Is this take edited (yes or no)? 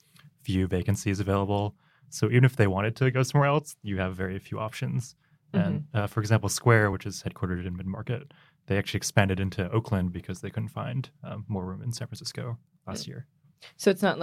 no